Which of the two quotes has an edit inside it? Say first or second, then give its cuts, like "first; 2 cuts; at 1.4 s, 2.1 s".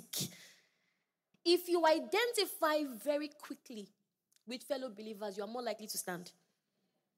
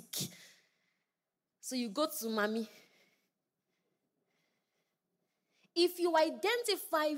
first; 1 cut; at 1.3 s